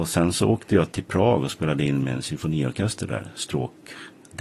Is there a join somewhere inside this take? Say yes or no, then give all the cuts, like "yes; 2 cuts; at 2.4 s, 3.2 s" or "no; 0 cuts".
yes; 1 cut; at 0.9 s